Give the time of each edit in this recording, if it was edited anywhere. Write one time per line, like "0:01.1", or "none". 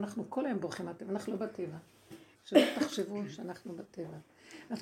0:02.3